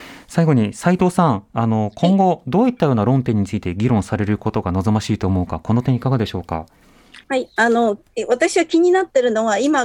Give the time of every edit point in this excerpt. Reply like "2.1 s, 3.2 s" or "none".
7.2 s